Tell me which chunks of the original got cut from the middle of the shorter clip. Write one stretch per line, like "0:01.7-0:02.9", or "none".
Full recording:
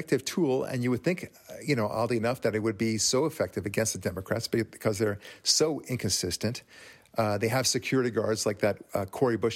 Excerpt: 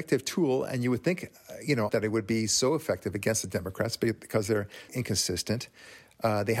0:01.9-0:02.4
0:05.4-0:05.8

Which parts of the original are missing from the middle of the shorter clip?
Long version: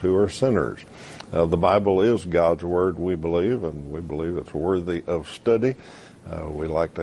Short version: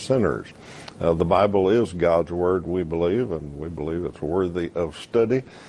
none

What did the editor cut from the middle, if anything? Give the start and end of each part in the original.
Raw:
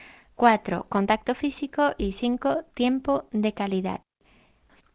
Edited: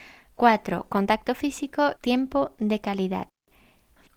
0:02.0-0:02.7

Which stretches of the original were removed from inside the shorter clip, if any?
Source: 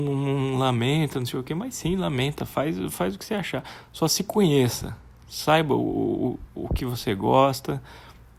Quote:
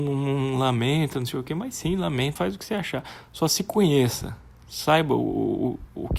0:02.4-0:03.0

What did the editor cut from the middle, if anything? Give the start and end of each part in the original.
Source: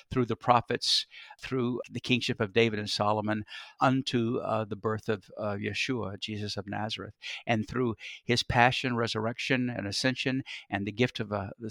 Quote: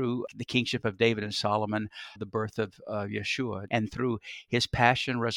0:03.7-0:04.7
0:06.2-0:07.4

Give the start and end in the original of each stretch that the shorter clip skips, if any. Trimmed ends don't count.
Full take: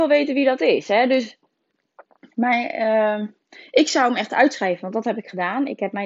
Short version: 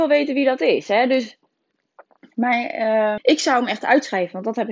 0:03.2-0:03.7

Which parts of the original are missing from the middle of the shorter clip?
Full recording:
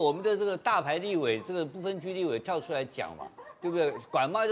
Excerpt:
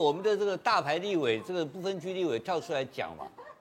none

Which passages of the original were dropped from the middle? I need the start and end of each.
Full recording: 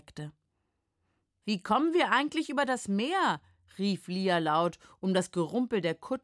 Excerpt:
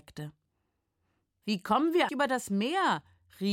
0:02.1-0:02.5

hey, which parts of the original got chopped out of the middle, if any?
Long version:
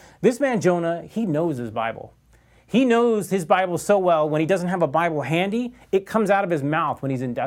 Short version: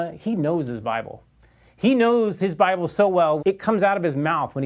0:04.3-0:05.9

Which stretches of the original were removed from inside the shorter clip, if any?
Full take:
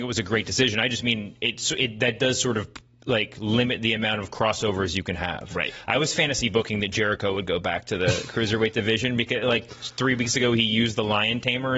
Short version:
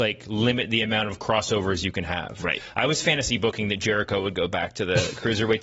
none

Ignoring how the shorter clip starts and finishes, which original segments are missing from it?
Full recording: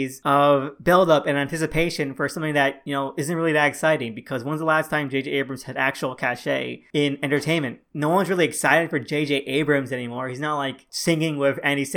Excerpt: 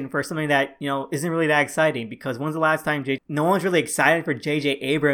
0:05.2-0:07.8

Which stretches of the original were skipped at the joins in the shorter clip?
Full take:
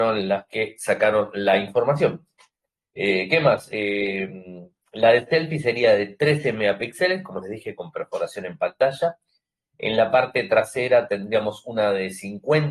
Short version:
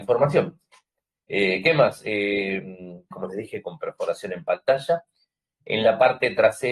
0:04.8-0:07.2

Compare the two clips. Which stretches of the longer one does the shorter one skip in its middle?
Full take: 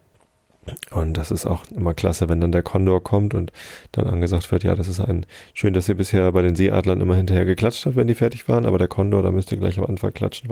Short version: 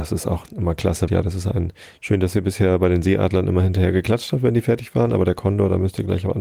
0:02.3-0:04.6

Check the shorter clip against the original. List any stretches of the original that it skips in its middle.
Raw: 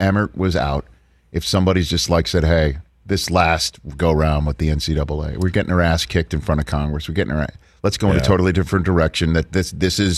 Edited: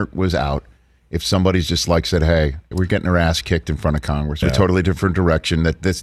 0:02.9-0:05.4
0:07.1-0:08.1

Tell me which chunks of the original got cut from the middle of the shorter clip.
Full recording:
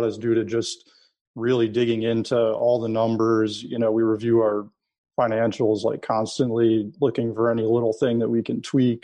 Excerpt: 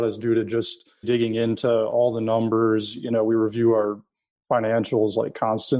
0:01.0-0:01.7

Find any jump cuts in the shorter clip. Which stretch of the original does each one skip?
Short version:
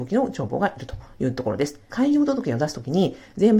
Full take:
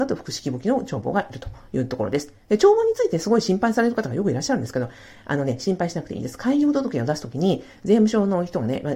0:02.4-0:06.4

